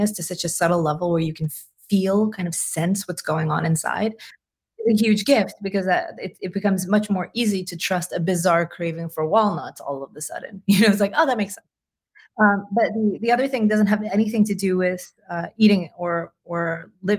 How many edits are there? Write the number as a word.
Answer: zero